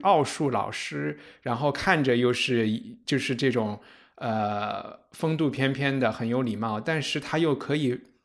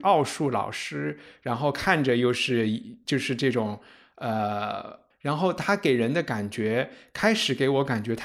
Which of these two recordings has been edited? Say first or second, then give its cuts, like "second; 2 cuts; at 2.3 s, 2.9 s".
second; 1 cut; at 5.1 s